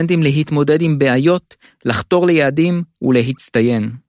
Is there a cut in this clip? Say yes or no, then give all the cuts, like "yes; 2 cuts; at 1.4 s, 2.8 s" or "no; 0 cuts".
yes; 1 cut; at 1.7 s